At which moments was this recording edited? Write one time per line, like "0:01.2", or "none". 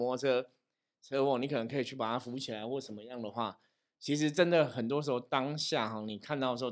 none

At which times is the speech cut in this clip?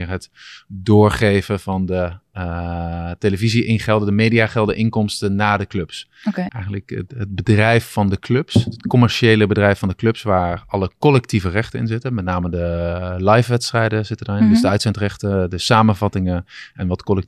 0:06.5

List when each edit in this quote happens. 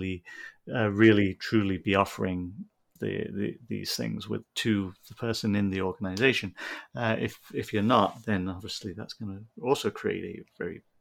0:03.0

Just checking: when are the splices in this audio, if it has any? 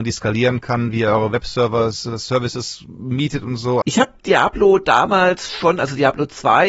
0:03.8

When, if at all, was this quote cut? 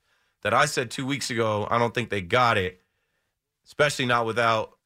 none

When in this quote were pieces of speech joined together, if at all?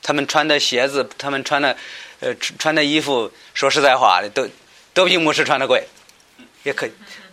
none

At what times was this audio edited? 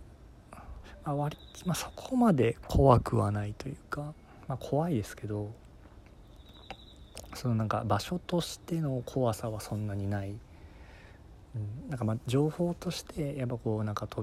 none

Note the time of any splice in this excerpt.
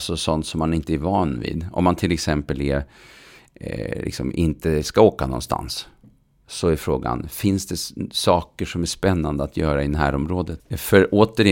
0:10.6

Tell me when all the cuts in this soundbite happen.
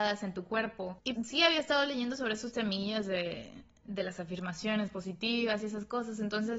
0:01.2

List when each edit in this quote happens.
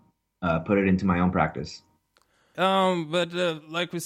0:02.5

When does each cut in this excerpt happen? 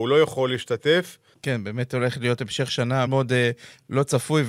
0:01.3
0:03.1

